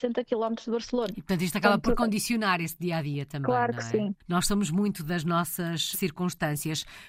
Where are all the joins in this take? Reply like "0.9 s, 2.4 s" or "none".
5.9 s